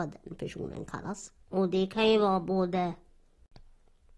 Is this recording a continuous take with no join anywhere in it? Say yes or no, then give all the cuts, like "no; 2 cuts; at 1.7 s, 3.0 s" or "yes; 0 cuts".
no; 1 cut; at 1.4 s